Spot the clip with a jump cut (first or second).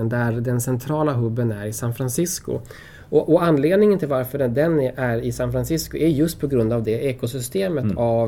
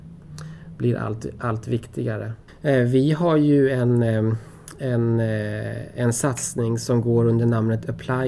second